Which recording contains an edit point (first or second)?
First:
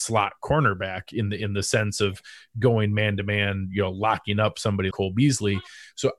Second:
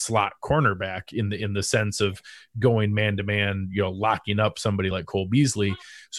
first